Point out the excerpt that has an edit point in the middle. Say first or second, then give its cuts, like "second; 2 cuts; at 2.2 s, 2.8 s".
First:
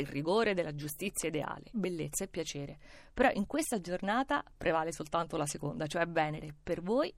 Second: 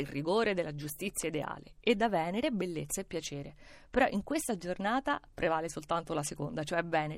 first; 1 cut; at 1.7 s